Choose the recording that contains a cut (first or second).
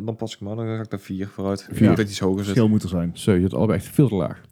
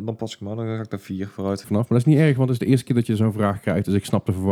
second